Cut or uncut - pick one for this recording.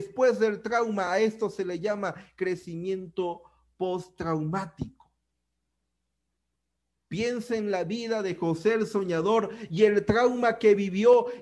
uncut